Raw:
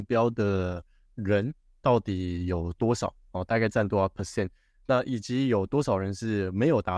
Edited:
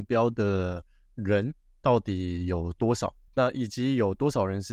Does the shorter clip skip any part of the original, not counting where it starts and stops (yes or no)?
yes